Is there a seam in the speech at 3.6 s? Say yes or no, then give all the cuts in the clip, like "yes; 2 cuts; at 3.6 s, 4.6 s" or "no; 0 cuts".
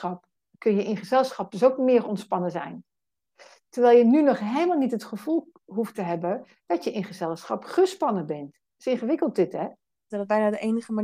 no; 1 cut; at 10.1 s